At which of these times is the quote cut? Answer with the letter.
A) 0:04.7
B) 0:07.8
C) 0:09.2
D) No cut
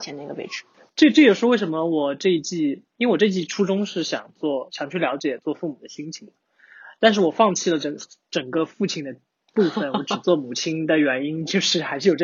D